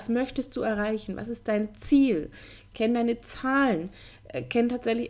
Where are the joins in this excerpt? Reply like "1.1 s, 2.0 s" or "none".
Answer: none